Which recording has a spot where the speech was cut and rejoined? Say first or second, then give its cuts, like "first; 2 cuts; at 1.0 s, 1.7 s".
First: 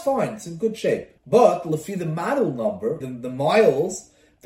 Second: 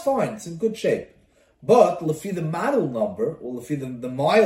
first; 2 cuts; at 1.2 s, 3.0 s